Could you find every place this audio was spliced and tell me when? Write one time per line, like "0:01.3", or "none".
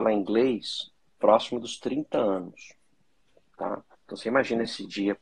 0:03.9